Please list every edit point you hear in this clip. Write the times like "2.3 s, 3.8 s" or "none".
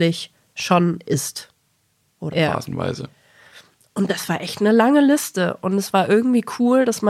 2.3 s